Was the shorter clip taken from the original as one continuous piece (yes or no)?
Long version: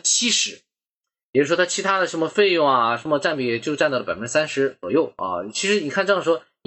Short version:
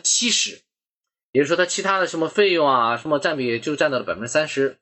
yes